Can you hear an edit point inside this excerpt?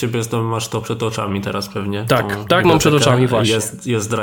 no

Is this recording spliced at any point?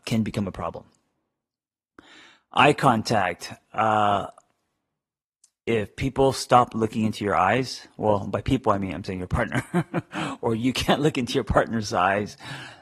no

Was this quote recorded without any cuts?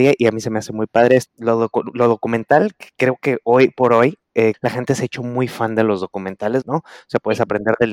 no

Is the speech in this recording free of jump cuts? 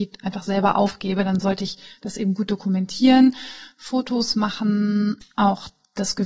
yes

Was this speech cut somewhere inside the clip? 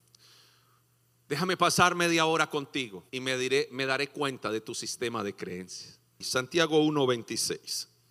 yes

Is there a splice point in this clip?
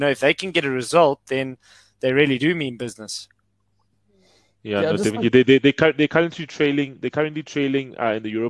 no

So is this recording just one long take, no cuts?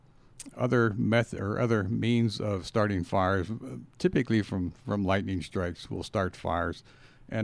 yes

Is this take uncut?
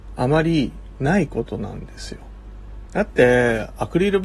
yes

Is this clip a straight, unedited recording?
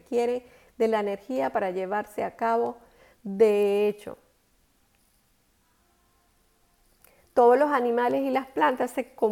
no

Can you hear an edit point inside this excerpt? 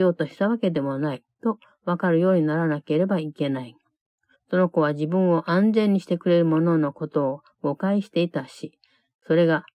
yes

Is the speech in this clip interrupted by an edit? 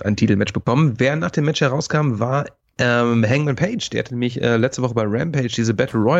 no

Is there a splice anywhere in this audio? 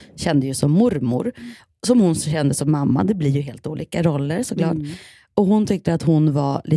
no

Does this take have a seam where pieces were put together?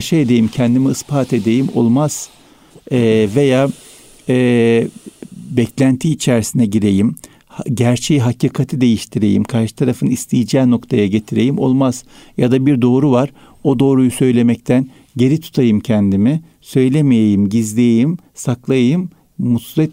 no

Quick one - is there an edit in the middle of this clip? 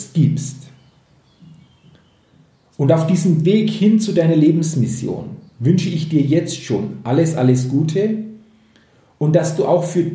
no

